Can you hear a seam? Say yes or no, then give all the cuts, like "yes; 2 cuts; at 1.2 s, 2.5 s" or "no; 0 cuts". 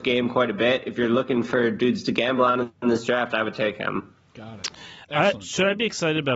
no; 0 cuts